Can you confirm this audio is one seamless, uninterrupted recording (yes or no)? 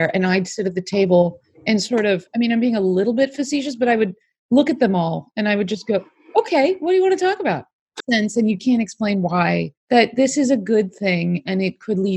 no